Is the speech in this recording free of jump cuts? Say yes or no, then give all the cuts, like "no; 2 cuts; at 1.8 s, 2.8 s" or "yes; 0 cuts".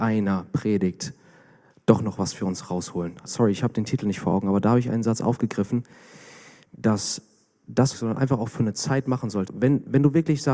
no; 3 cuts; at 3.3 s, 7.9 s, 9.5 s